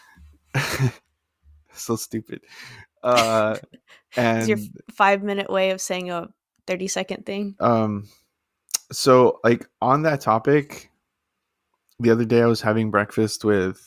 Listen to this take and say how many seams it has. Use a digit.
1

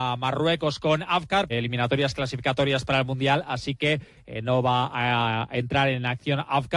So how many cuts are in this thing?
1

